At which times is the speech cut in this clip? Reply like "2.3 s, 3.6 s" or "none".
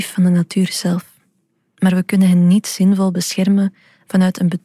1.7 s